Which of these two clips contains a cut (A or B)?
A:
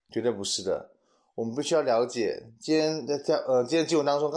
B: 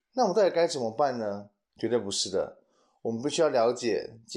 B